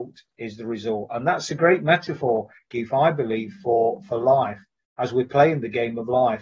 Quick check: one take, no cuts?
yes; 0 cuts

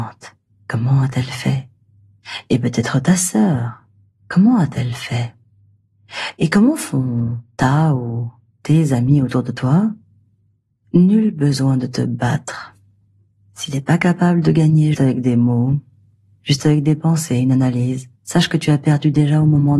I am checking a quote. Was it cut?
yes; 2 cuts; at 14.9 s, 18.2 s

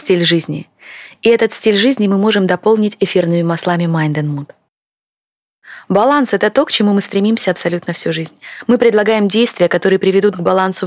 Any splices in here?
no; 0 cuts

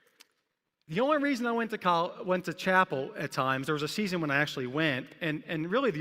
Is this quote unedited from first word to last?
yes; 0 cuts

